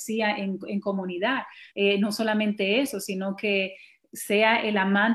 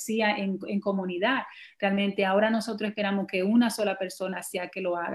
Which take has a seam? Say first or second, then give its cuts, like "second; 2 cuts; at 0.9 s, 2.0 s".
first; 1 cut; at 1.7 s